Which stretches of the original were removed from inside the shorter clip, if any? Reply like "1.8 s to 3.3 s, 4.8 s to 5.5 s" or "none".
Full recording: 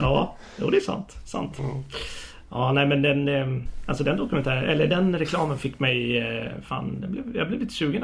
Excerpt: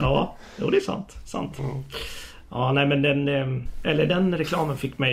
3.8 s to 4.7 s